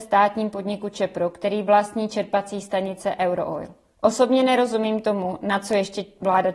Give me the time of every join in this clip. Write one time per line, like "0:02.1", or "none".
none